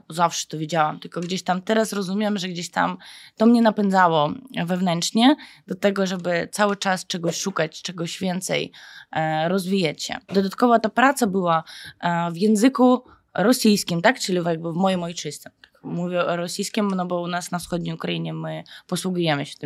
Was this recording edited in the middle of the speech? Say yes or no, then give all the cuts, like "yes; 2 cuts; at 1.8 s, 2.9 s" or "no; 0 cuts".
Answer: yes; 1 cut; at 10.3 s